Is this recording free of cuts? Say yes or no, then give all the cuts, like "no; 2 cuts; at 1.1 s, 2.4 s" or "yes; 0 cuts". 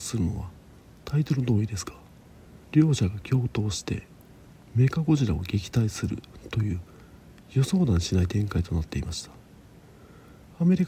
no; 1 cut; at 2.6 s